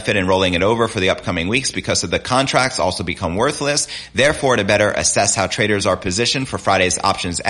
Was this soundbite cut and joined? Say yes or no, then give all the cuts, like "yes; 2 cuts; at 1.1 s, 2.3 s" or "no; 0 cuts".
no; 0 cuts